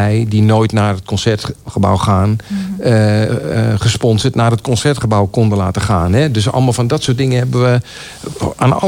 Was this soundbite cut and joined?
no; 0 cuts

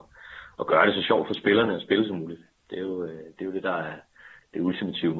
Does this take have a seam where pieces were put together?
no; 0 cuts

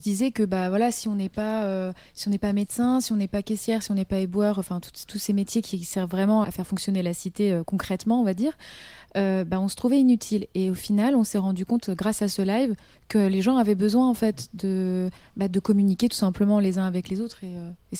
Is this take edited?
yes; 1 cut; at 6.4 s

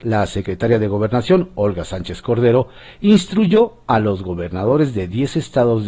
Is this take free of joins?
yes; 0 cuts

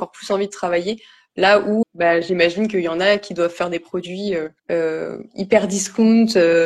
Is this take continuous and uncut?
no; 2 cuts; at 1.8 s, 4.6 s

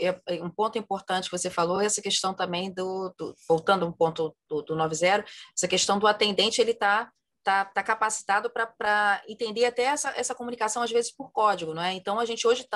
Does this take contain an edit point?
no; 0 cuts

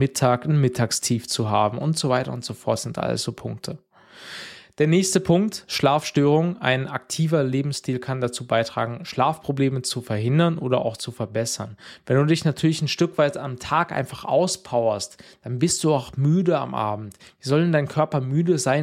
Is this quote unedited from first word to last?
yes; 0 cuts

